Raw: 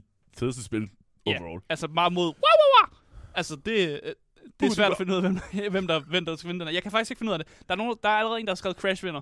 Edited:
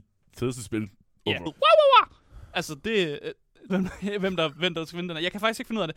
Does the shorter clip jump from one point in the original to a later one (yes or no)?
yes